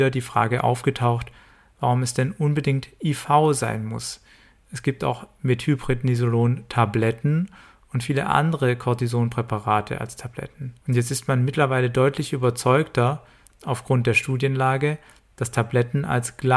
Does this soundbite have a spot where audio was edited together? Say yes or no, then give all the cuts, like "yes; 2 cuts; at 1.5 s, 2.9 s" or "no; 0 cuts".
yes; 1 cut; at 10.8 s